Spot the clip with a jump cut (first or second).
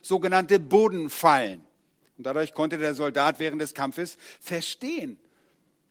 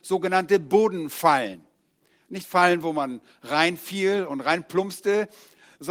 first